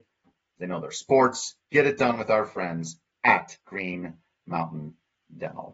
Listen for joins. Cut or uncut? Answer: cut